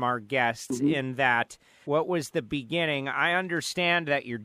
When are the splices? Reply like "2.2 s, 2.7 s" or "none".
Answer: 1.8 s